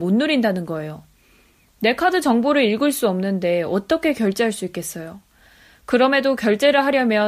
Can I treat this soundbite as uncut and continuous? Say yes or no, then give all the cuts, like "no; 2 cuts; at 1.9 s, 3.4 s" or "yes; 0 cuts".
yes; 0 cuts